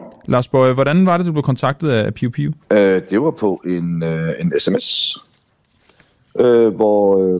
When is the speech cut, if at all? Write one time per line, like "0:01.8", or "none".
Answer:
0:02.6